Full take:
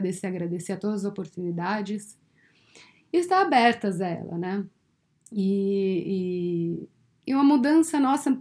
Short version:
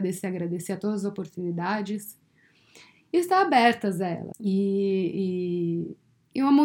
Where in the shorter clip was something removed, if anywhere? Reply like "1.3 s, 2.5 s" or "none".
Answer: 4.3 s